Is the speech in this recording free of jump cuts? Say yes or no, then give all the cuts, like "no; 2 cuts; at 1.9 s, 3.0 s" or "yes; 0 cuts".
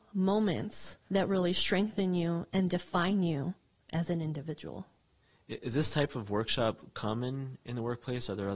no; 1 cut; at 1.0 s